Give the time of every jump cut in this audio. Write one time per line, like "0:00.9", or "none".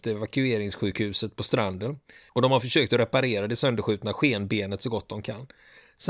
0:02.3